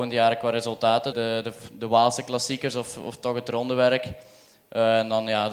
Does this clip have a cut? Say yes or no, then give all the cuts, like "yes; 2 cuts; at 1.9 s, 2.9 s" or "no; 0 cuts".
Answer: yes; 1 cut; at 1.1 s